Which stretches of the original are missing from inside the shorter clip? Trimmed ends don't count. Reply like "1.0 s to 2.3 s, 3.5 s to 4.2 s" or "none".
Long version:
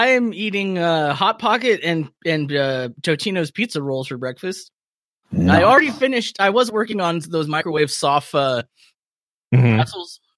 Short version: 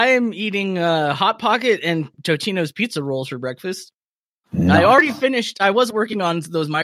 2.1 s to 2.9 s